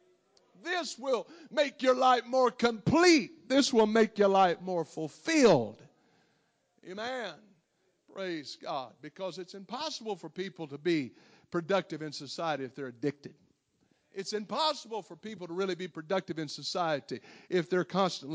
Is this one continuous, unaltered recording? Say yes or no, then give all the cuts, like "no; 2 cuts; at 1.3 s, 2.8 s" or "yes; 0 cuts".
yes; 0 cuts